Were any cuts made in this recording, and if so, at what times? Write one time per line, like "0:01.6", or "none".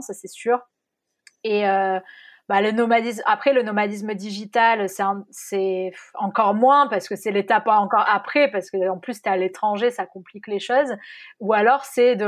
none